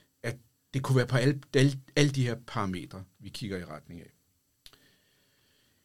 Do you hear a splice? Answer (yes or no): no